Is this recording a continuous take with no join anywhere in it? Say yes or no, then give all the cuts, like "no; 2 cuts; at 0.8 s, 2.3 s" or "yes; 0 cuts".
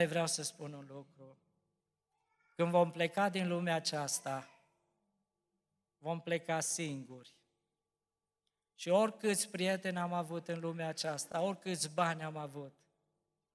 yes; 0 cuts